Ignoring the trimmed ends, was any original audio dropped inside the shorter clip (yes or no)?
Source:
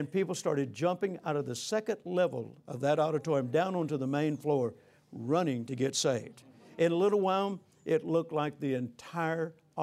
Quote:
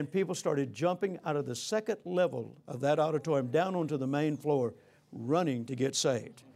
no